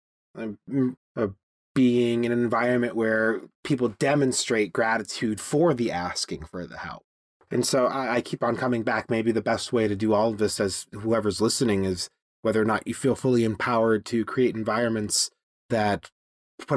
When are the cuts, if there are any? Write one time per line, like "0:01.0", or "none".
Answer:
0:01.0